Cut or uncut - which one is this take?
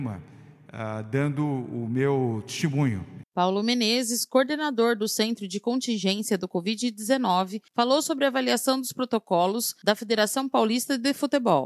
cut